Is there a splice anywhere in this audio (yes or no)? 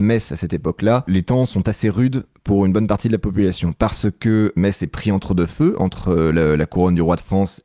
no